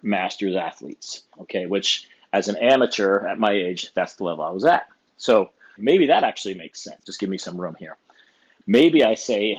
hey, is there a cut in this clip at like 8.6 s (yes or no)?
no